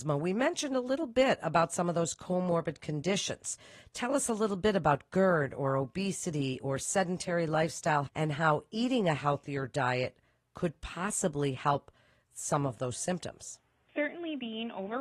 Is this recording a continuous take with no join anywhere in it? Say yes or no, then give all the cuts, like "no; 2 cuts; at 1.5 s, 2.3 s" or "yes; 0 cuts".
no; 1 cut; at 8.1 s